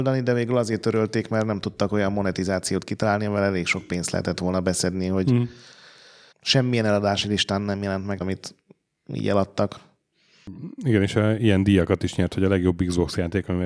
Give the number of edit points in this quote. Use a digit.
2